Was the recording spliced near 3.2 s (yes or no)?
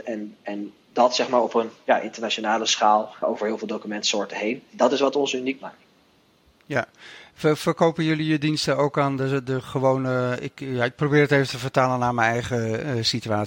yes